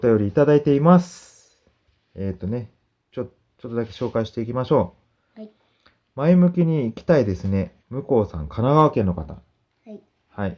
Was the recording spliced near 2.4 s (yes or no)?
no